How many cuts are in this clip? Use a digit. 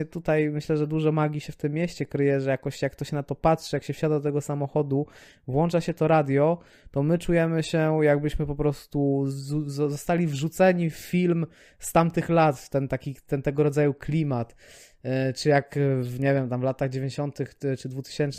0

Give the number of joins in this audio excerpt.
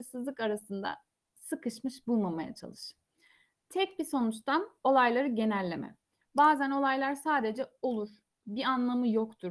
2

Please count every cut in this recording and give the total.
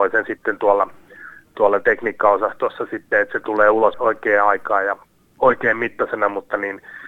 1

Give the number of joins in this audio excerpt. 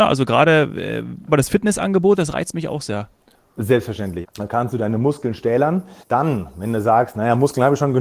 3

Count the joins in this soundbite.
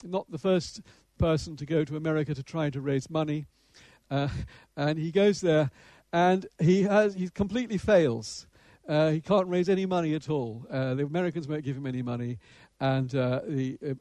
0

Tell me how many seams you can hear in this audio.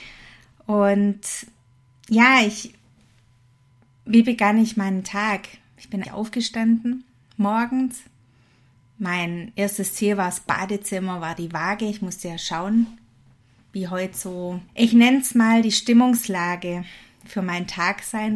2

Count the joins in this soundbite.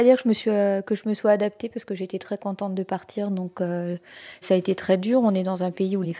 0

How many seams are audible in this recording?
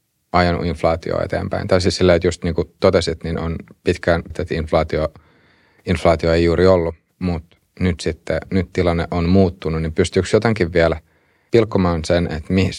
2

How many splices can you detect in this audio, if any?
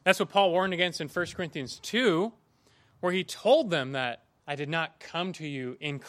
0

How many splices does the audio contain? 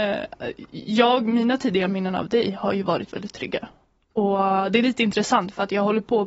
0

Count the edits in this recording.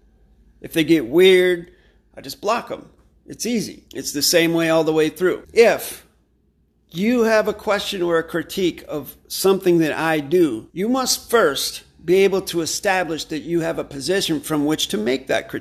3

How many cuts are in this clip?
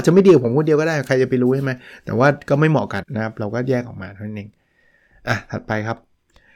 1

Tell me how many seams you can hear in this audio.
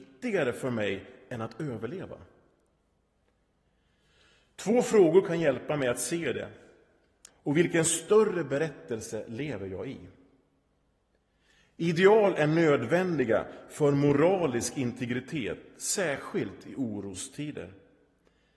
1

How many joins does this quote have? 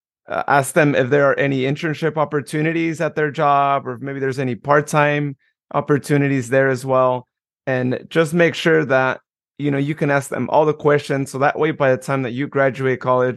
0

